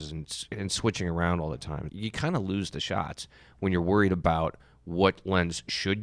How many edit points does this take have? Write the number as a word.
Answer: one